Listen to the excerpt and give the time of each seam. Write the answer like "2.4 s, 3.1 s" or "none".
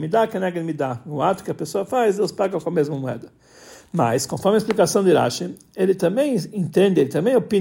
none